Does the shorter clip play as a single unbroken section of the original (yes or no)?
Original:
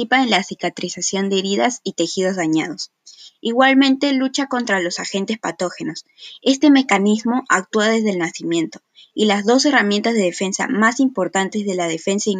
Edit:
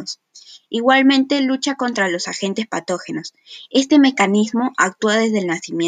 yes